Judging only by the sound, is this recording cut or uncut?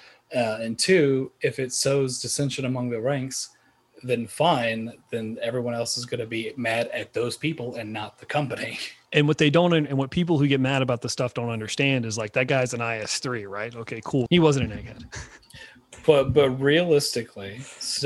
cut